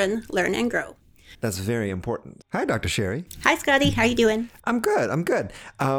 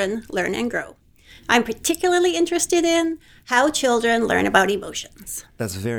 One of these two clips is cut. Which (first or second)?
first